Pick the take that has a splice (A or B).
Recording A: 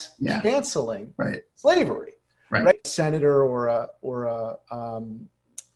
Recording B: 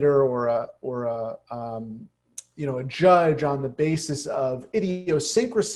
A